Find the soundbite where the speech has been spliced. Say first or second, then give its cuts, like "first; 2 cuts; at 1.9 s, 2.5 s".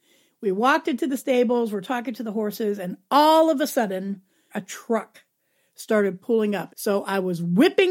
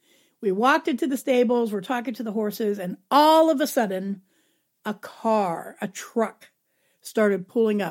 first; 2 cuts; at 4.5 s, 6.7 s